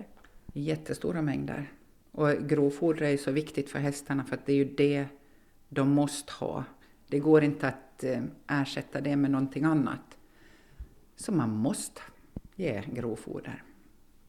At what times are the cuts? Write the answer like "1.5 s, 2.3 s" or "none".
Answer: 11.0 s